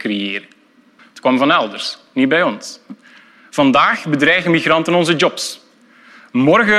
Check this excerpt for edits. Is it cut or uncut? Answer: cut